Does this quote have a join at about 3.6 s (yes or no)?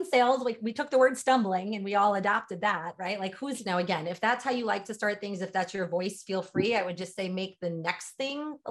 yes